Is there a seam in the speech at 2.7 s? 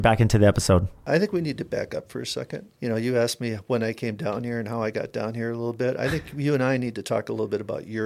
yes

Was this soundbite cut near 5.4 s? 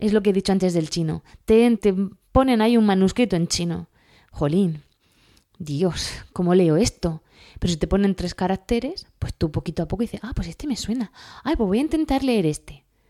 no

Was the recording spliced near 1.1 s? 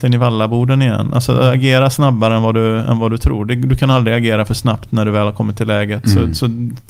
no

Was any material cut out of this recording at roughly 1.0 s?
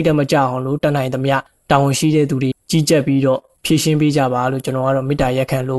no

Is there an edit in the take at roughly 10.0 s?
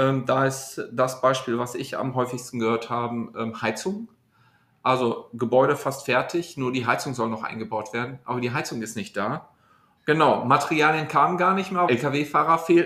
yes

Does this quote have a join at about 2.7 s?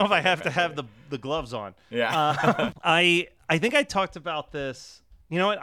yes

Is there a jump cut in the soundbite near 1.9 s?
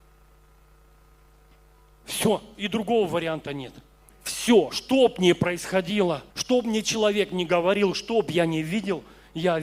no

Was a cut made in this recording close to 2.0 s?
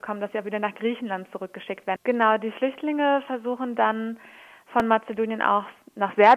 yes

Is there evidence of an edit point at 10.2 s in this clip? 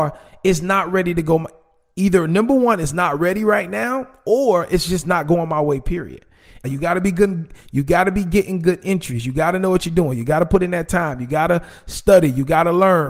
no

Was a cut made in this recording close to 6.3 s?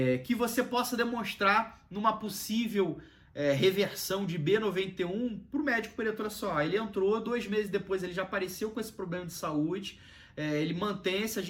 no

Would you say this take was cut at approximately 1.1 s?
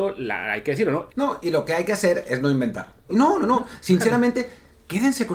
yes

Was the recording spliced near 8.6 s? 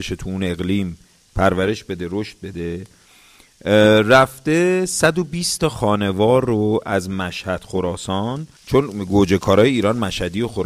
yes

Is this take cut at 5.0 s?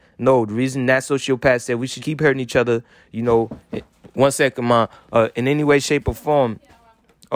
no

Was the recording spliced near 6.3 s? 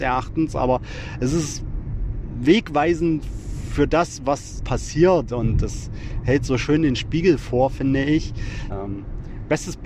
no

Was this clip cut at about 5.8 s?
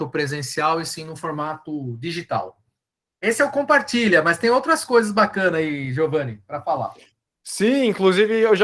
no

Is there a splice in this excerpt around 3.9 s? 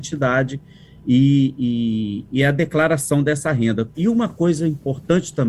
yes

